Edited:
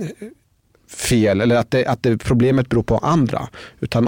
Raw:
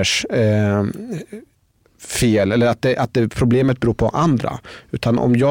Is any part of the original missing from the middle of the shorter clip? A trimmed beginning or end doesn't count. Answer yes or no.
no